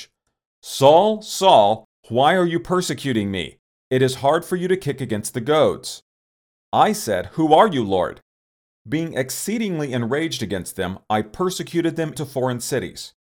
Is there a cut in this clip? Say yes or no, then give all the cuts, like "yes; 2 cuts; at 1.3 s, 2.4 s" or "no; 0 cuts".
yes; 2 cuts; at 8.7 s, 12.2 s